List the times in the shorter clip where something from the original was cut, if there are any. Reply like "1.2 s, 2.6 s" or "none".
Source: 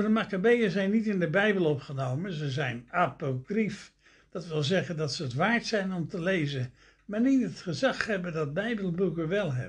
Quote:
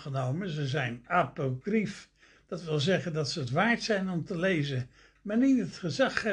none